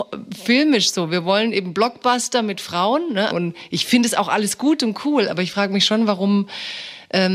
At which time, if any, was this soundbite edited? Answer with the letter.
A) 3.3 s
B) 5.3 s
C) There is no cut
A